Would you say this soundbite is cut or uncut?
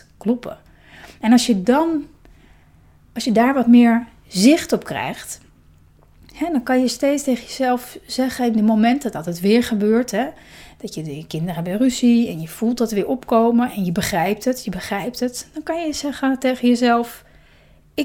uncut